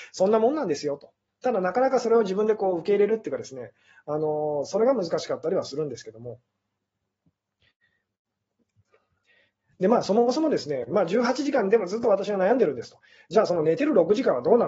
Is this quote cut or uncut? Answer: uncut